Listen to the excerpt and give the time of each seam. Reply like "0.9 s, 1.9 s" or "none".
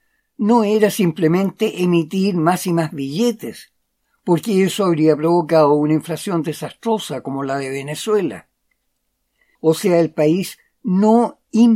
9.6 s